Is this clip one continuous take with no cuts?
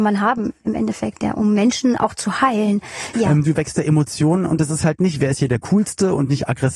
no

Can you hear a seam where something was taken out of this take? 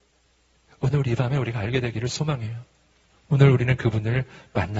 yes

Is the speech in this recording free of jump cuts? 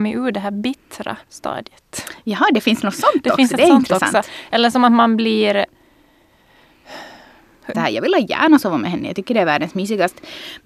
no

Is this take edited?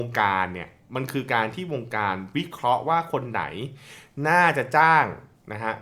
no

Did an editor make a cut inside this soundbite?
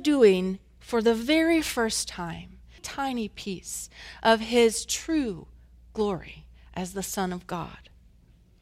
yes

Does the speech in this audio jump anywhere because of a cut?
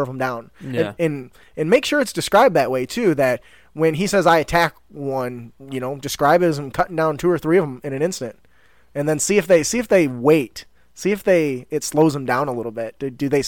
no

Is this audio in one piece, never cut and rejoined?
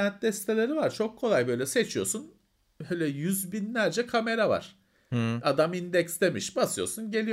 yes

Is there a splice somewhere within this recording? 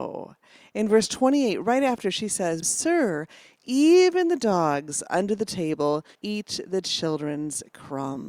yes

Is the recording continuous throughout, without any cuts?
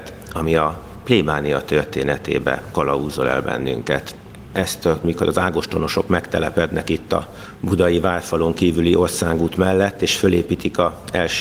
no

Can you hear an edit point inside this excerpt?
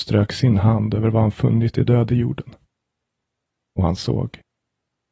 no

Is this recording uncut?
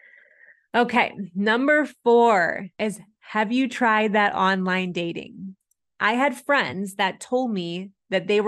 no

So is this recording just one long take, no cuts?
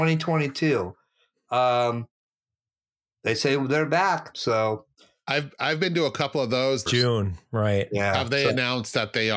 no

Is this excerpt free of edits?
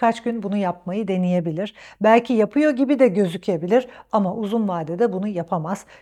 yes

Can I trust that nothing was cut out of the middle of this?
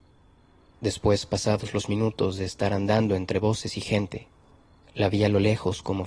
yes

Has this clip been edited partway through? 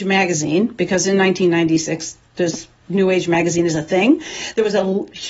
no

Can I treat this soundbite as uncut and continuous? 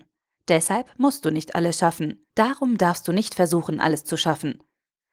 no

